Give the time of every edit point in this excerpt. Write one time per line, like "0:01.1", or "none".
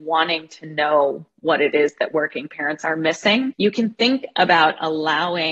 0:03.5